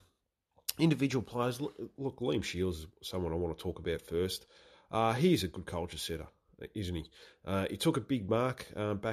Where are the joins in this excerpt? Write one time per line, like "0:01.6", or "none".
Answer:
none